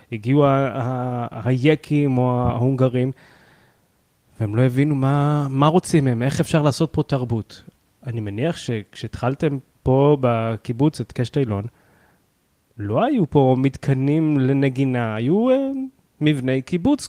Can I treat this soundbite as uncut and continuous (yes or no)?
yes